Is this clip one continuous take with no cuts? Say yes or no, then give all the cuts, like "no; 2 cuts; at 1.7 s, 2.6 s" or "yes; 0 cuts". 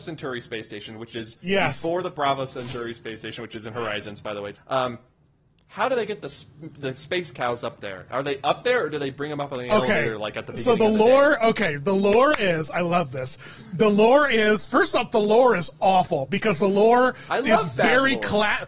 no; 1 cut; at 4.5 s